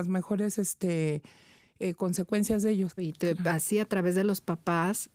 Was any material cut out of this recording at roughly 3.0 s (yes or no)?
yes